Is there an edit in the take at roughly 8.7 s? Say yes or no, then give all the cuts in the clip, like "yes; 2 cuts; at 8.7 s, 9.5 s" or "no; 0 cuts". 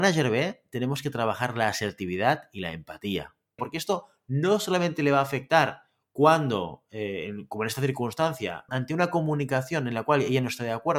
yes; 2 cuts; at 3.6 s, 8.7 s